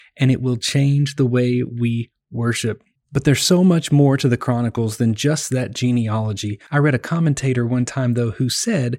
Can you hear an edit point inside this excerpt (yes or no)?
yes